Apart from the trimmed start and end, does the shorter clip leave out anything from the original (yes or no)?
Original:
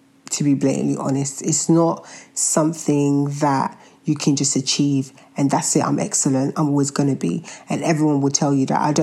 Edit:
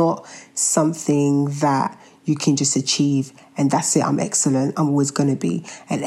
no